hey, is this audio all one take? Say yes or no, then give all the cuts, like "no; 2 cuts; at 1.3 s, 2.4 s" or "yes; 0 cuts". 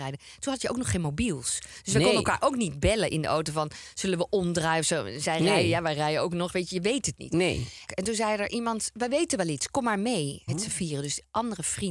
no; 2 cuts; at 7.9 s, 10.5 s